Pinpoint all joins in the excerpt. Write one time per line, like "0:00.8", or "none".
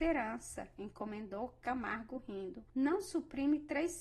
0:02.7